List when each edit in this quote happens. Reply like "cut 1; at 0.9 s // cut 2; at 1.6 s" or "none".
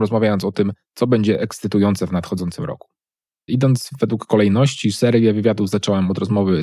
cut 1; at 3.5 s